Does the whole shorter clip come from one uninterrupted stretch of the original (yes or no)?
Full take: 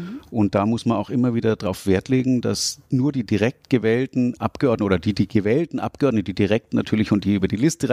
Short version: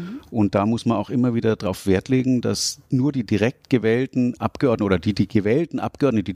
yes